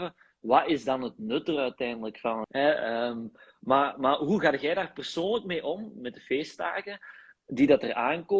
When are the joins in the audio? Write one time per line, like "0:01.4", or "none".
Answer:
0:02.4